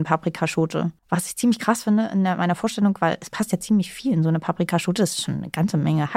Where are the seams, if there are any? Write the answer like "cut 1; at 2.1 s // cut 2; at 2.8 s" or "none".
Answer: cut 1; at 1.0 s